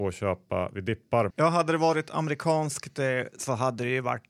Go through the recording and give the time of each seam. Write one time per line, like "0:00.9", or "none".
0:01.3